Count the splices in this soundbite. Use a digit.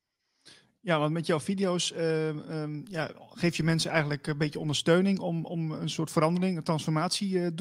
0